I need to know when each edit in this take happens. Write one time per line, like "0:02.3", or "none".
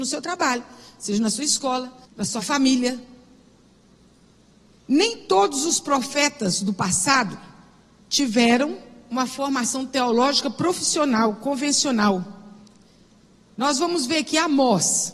0:02.0